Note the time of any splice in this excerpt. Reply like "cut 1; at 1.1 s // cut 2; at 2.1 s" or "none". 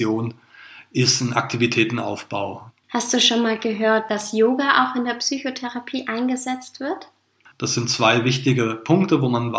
cut 1; at 2.7 s // cut 2; at 7.5 s